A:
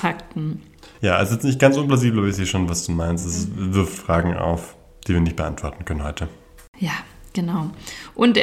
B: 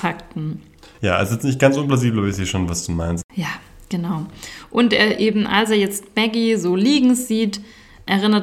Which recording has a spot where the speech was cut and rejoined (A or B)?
B